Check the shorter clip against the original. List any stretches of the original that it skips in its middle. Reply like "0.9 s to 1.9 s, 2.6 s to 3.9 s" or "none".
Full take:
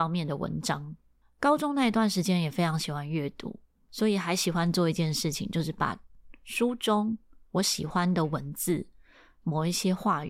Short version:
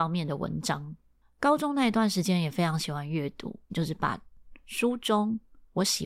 3.7 s to 5.5 s